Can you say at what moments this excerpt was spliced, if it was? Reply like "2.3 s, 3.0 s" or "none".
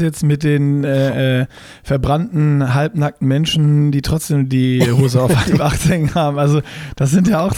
none

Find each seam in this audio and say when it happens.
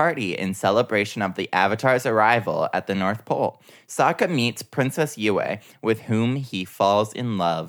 none

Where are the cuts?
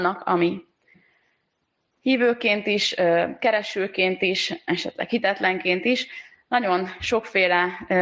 none

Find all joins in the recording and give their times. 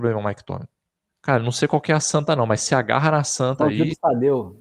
1.1 s

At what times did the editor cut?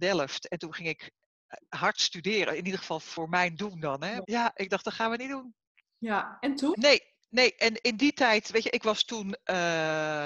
4.2 s, 6.7 s

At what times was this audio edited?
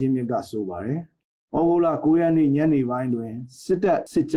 none

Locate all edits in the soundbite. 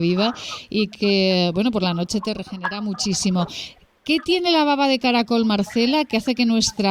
none

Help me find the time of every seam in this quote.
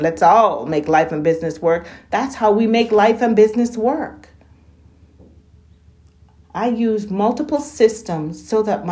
none

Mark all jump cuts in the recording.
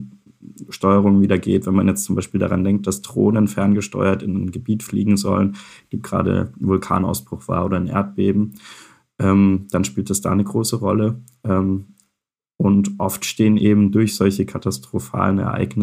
none

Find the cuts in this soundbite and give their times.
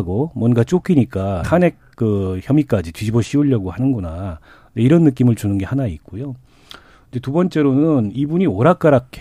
1.4 s

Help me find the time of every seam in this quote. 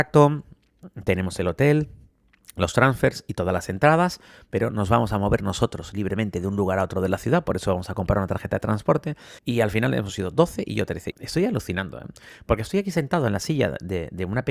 9.4 s, 11.1 s

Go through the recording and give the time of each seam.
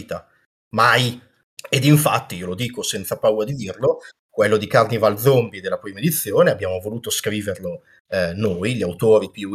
1.5 s

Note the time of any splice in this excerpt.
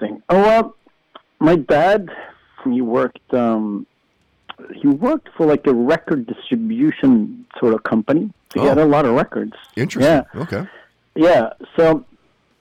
2.7 s

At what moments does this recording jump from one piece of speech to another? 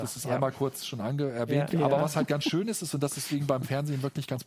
1.7 s

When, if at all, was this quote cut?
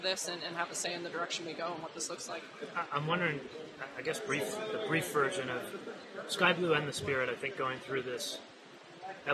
none

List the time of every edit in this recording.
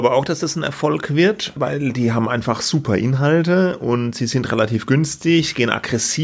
1.6 s

